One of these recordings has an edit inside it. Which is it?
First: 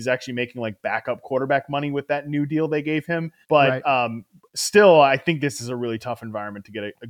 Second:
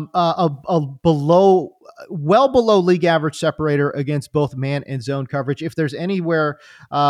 first; 1 cut; at 3.4 s

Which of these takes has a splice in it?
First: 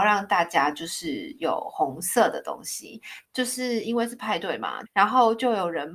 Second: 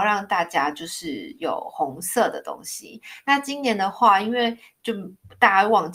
first; 2 cuts; at 3.2 s, 4.9 s

